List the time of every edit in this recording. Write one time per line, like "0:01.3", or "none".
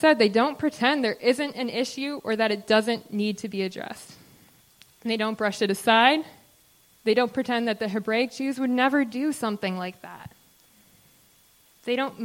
none